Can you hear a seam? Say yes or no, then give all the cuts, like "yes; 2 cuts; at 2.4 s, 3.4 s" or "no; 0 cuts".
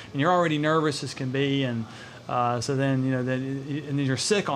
no; 0 cuts